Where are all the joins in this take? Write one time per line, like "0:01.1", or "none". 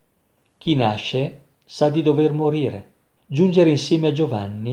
0:03.2